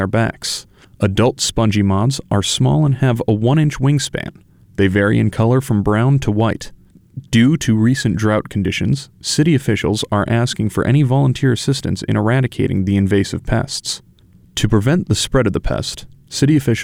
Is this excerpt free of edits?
yes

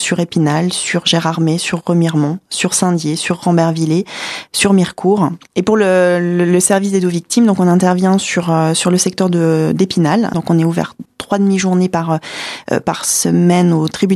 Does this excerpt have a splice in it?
yes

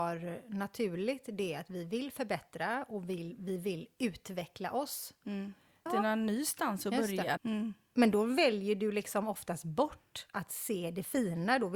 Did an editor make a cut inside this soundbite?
yes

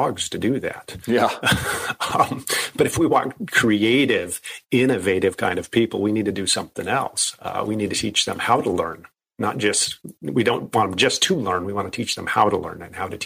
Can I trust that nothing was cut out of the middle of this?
yes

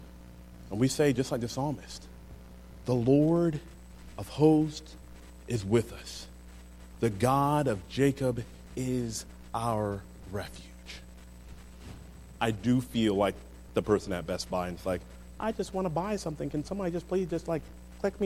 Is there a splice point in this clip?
yes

